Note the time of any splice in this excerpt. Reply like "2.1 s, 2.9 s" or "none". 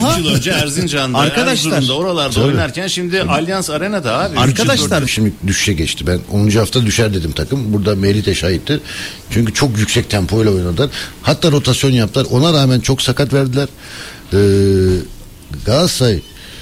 5.1 s